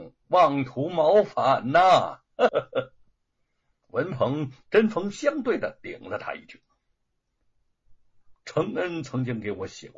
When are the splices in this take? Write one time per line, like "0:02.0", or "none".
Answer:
0:02.5
0:07.4